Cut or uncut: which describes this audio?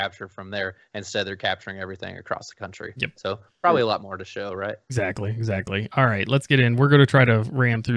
uncut